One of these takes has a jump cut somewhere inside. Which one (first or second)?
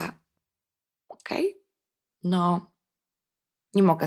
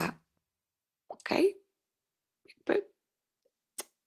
first